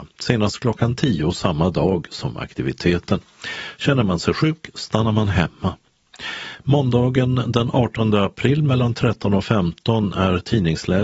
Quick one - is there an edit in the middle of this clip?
no; 0 cuts

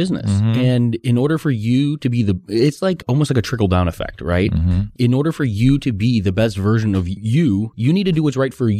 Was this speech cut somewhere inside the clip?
no; 0 cuts

